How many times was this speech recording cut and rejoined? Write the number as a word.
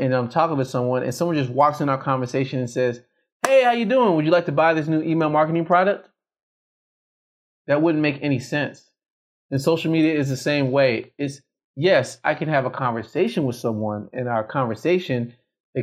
zero